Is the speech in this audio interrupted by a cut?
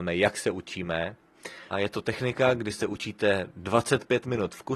yes; 1 cut; at 1.7 s

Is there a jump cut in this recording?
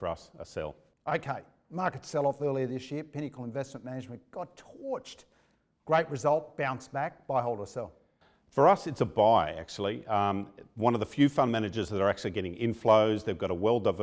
no; 0 cuts

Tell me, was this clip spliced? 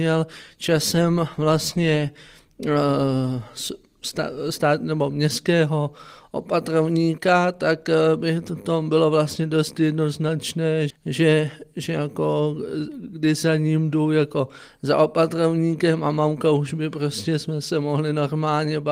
yes; 1 cut; at 10.9 s

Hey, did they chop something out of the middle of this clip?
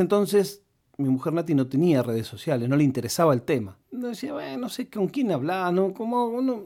yes; 1 cut; at 3.8 s

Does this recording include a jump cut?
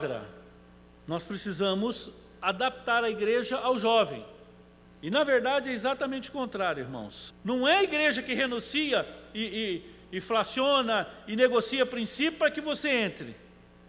yes; 2 cuts; at 4.8 s, 7.3 s

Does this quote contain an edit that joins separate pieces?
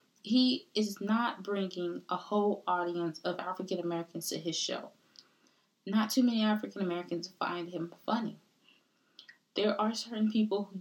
no; 0 cuts

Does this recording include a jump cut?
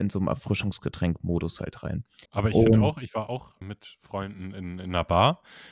yes; 2 cuts; at 2.3 s, 3.6 s

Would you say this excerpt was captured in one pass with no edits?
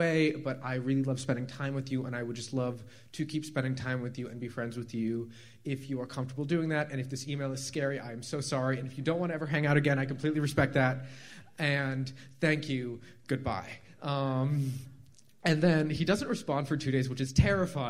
yes; 0 cuts

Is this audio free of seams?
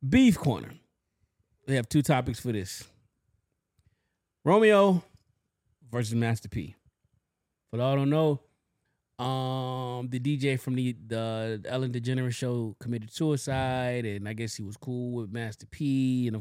yes; 0 cuts

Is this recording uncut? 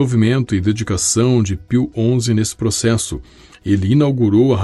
yes; 0 cuts

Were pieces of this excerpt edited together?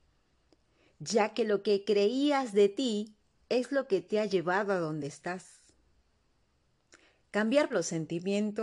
yes; 1 cut; at 7.7 s

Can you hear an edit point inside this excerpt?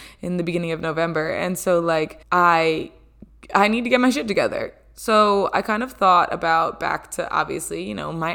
yes; 1 cut; at 2.2 s

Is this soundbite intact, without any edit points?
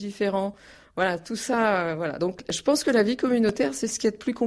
yes; 0 cuts

